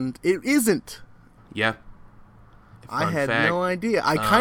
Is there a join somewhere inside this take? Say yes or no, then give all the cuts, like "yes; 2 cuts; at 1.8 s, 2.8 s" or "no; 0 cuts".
yes; 2 cuts; at 1.4 s, 2.8 s